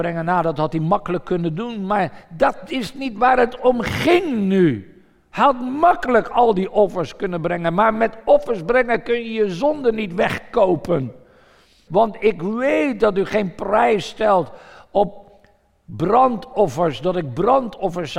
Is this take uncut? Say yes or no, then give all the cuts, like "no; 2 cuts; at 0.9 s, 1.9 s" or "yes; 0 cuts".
no; 1 cut; at 11.9 s